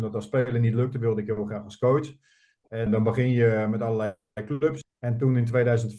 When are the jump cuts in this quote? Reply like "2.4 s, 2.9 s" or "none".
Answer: 2.9 s, 4.8 s